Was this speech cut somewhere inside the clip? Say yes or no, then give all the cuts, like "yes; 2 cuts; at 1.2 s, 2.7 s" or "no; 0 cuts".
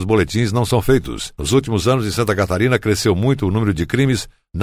no; 0 cuts